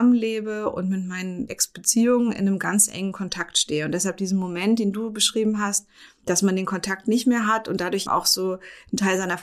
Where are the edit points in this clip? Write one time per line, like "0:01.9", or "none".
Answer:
0:01.5
0:08.1

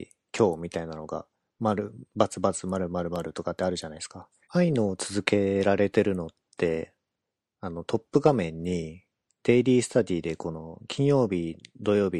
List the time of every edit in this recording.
0:04.4

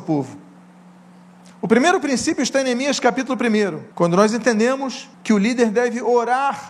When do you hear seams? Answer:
0:03.9
0:05.1

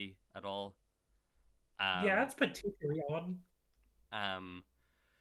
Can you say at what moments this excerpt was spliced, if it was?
0:04.0

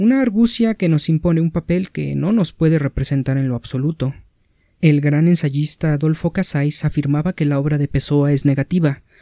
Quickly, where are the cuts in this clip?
0:04.7

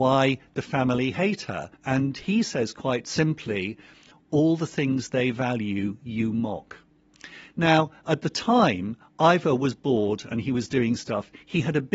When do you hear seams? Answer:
0:01.7

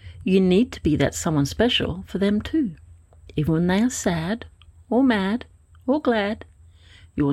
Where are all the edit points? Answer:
none

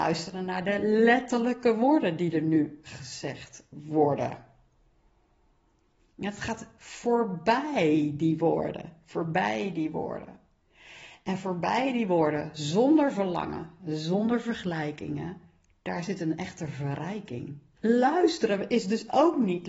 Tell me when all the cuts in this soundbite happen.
0:13.8
0:17.8

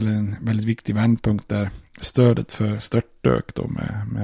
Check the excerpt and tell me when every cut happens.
0:02.8

